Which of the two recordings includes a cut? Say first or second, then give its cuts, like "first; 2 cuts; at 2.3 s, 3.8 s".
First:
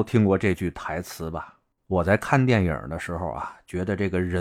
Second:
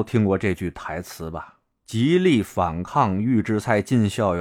first; 1 cut; at 1.7 s